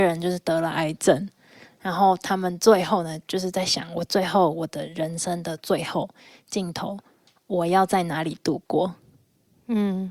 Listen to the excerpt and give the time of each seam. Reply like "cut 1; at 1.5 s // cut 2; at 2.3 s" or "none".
none